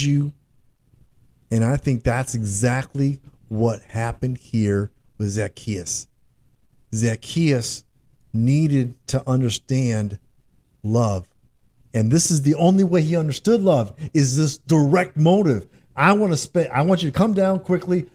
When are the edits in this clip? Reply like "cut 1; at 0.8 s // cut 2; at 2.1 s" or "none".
cut 1; at 1.4 s